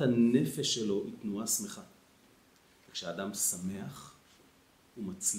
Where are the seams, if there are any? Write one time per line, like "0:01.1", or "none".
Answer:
none